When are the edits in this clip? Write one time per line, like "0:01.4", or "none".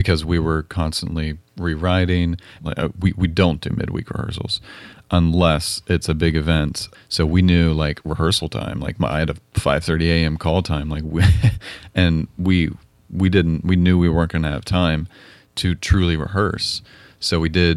0:02.6
0:06.9